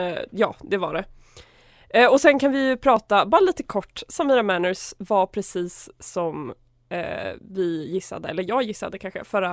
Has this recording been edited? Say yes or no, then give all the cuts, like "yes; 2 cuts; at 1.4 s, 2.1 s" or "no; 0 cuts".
no; 0 cuts